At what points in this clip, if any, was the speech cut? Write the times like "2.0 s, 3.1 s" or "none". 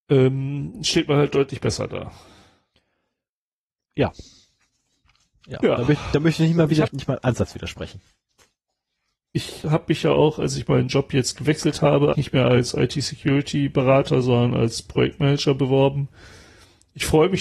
6.9 s, 9.6 s, 12.1 s